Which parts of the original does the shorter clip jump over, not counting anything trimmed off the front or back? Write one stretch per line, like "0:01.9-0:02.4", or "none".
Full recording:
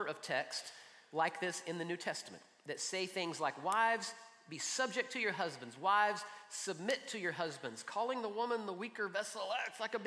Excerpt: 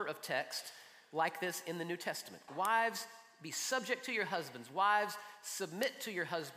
0:02.5-0:03.6